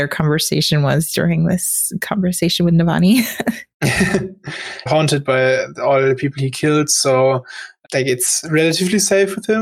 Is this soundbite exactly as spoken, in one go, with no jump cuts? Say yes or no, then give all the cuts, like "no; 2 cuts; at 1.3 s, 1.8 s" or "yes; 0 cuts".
no; 1 cut; at 4.9 s